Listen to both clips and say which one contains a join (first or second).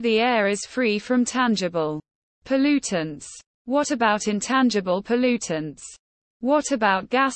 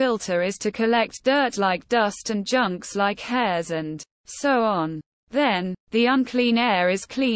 second